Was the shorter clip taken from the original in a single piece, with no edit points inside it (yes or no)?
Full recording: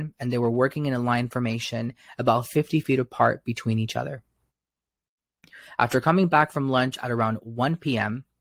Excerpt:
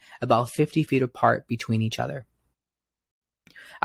yes